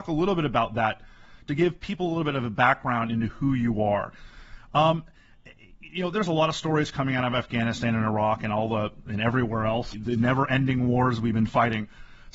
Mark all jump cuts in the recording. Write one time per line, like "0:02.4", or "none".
0:09.9